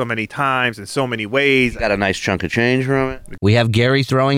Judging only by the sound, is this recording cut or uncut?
cut